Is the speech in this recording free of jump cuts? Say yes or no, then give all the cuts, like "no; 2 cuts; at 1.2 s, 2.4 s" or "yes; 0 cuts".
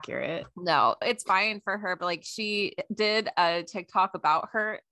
no; 1 cut; at 1.0 s